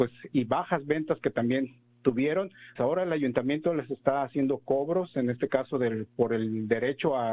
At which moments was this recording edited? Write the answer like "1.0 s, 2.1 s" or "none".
2.8 s